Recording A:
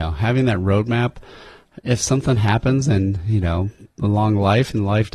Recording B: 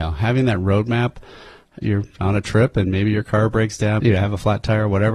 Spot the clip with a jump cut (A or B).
B